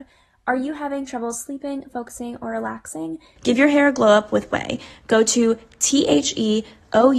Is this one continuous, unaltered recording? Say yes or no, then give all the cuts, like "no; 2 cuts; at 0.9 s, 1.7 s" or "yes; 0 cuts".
no; 1 cut; at 3.4 s